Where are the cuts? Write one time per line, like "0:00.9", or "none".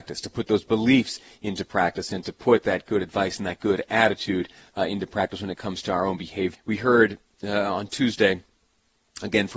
0:06.5